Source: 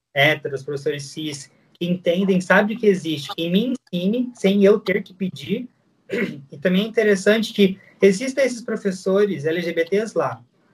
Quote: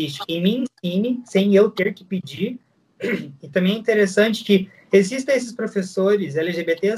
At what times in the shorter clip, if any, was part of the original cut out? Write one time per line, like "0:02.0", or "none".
none